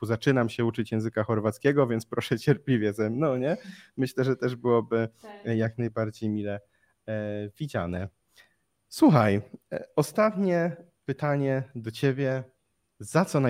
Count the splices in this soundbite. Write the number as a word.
zero